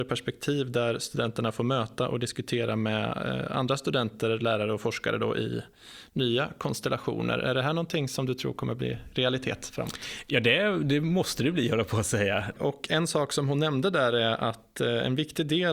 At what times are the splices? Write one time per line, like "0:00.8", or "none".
0:12.5